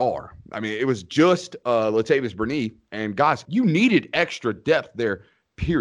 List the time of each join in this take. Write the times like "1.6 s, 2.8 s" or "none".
3.4 s